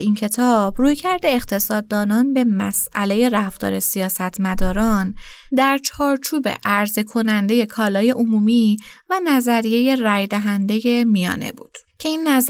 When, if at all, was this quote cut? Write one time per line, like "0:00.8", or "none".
none